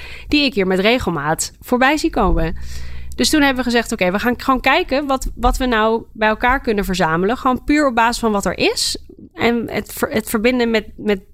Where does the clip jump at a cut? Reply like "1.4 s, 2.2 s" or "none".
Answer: none

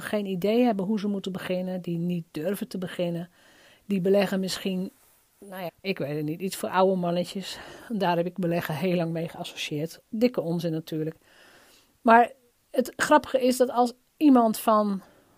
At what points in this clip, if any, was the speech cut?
5.7 s

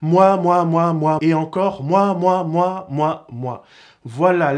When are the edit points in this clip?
1.2 s

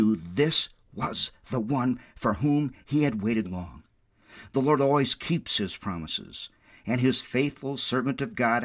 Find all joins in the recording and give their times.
3.4 s

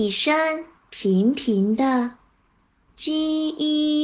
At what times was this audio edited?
2.9 s

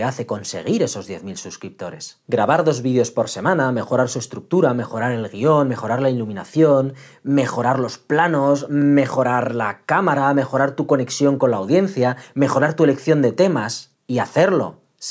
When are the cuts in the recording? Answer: none

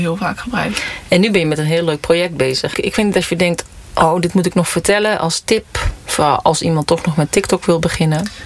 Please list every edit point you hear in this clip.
2.7 s

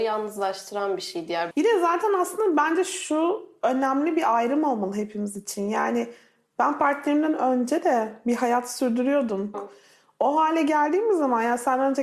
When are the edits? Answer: 1.5 s, 9.5 s

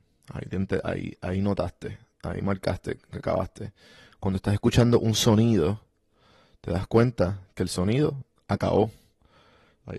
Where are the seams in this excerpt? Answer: none

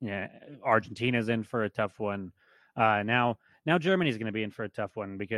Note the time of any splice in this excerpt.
none

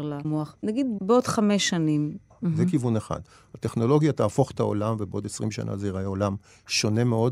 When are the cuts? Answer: 2.3 s

